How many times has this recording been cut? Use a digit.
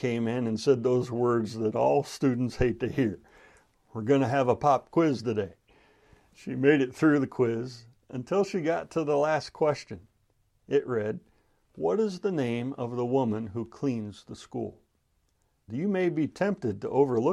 1